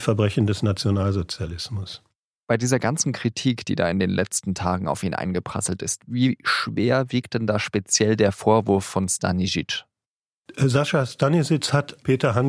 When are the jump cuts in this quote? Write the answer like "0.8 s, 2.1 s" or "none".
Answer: none